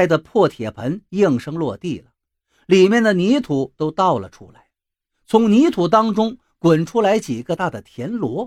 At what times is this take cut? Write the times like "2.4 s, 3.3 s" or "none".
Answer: 7.6 s